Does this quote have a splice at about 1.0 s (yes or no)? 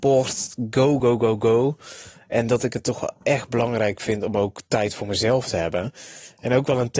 yes